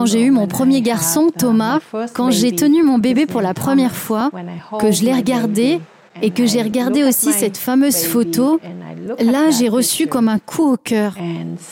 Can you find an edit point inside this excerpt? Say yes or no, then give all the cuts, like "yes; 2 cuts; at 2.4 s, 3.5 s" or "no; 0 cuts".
no; 0 cuts